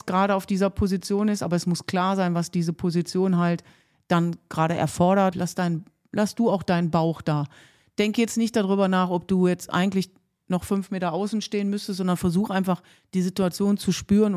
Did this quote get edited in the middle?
yes; 1 cut; at 5.3 s

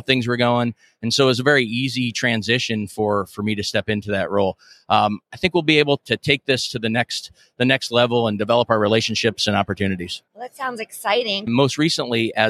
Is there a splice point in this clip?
yes; 3 cuts; at 6.0 s, 10.3 s, 11.5 s

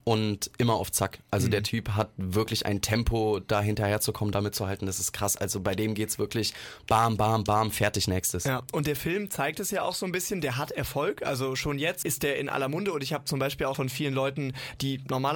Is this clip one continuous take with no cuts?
no; 2 cuts; at 12.0 s, 13.7 s

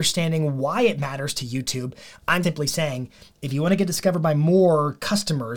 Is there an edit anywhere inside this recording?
yes; 1 cut; at 2.4 s

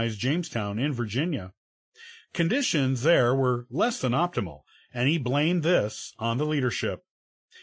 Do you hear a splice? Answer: no; 0 cuts

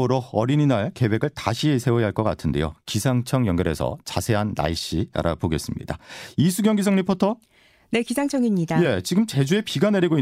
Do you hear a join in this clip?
no; 0 cuts

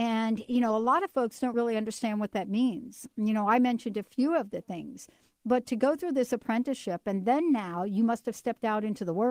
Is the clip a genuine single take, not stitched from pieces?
yes; 0 cuts

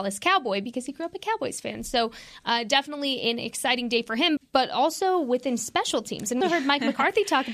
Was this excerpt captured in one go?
no; 2 cuts; at 4.4 s, 6.4 s

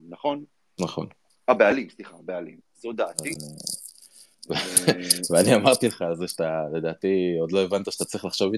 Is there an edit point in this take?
yes; 2 cuts; at 1.3 s, 2.6 s

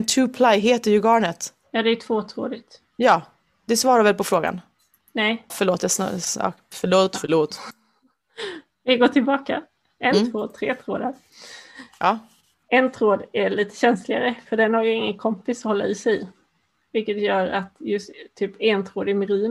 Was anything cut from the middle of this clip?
yes; 1 cut; at 5.5 s

